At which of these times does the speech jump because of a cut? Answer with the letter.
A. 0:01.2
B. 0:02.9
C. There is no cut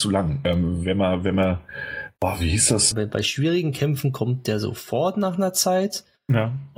B